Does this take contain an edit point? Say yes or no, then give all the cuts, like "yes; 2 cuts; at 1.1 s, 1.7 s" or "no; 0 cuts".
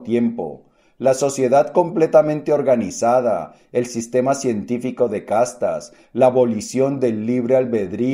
no; 0 cuts